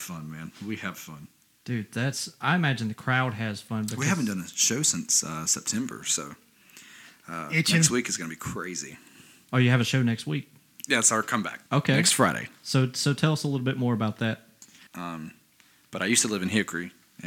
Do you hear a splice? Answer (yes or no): yes